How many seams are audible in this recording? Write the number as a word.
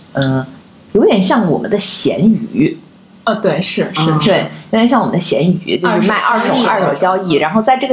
zero